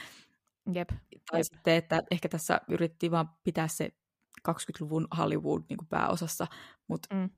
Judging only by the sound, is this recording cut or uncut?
uncut